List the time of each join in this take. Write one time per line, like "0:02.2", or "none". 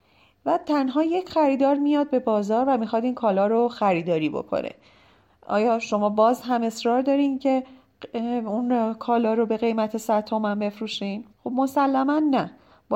0:11.3